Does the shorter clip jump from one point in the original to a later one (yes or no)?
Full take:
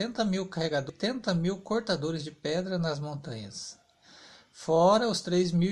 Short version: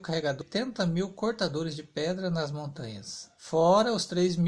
yes